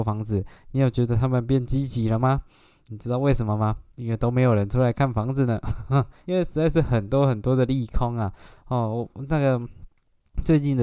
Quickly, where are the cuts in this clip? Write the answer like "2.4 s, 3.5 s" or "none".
2.8 s, 6.2 s